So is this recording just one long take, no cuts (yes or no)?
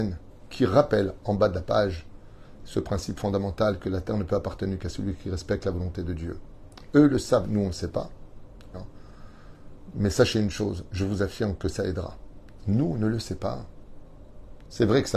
no